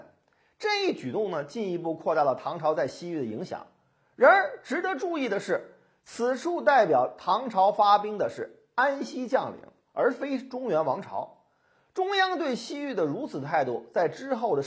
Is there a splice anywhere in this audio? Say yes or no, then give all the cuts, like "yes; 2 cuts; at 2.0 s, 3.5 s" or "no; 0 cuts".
no; 0 cuts